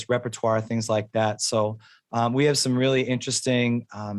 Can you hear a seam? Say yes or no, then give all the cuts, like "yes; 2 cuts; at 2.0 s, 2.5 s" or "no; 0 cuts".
no; 0 cuts